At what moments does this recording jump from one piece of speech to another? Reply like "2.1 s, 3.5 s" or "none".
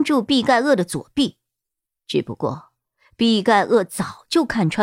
none